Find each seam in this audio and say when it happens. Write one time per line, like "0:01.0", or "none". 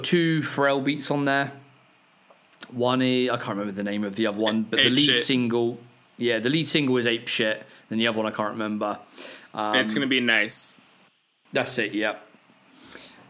none